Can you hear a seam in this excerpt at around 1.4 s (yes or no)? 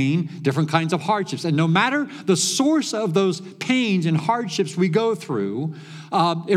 no